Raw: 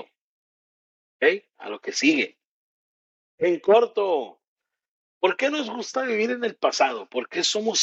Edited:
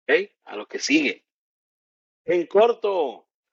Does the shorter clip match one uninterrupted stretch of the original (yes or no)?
yes